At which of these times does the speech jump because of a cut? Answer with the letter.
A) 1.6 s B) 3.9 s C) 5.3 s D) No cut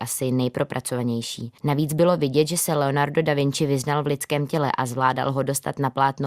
A